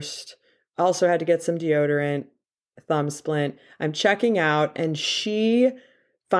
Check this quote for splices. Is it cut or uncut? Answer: uncut